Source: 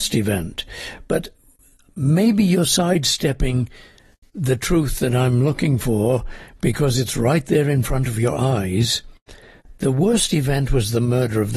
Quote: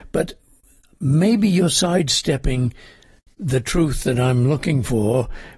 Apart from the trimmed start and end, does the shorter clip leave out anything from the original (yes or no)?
no